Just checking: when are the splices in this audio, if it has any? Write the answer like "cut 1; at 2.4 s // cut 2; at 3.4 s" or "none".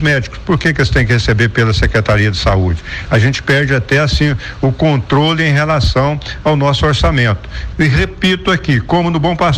cut 1; at 7.7 s